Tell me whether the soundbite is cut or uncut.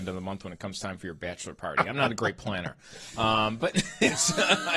uncut